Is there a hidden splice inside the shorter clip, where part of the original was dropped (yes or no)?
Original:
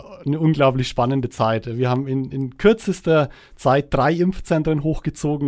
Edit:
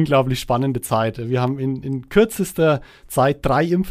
no